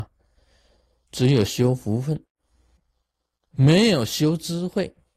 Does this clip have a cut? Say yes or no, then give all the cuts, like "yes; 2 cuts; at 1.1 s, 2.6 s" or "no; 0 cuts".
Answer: yes; 1 cut; at 1.1 s